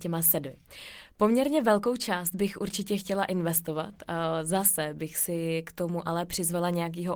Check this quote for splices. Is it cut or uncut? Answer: uncut